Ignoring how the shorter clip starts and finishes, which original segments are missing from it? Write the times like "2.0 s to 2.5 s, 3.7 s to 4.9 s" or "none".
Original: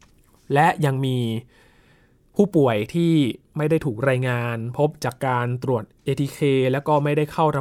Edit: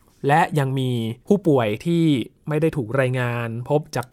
1.5 s to 2.3 s